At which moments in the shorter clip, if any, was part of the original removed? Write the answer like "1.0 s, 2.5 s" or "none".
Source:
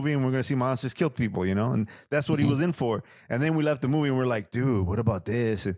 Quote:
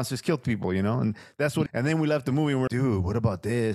1.7 s, 2.7 s